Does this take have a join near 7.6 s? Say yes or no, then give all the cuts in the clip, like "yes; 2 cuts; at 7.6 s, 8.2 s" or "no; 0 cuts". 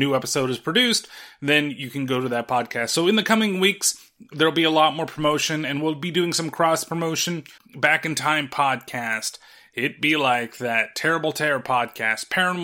yes; 1 cut; at 7.6 s